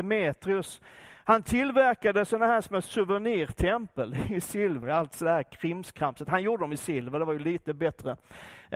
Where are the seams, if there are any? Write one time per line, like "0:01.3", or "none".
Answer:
0:04.8